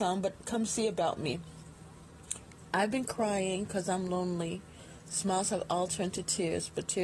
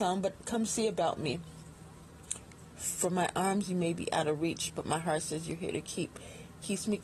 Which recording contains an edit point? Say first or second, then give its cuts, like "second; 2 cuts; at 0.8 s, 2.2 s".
second; 1 cut; at 2.7 s